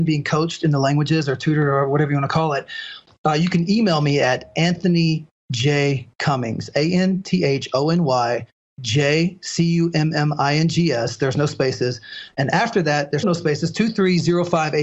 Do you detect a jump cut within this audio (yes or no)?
yes